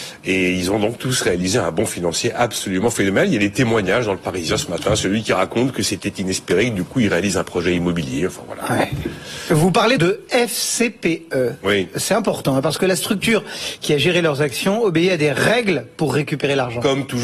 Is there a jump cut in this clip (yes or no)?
yes